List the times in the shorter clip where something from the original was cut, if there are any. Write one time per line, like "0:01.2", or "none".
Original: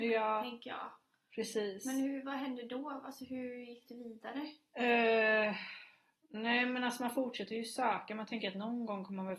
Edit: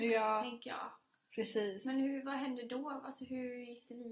none